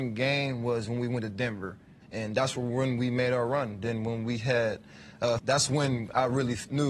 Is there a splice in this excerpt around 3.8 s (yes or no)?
no